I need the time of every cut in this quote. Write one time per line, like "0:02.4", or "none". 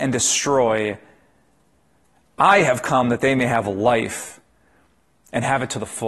none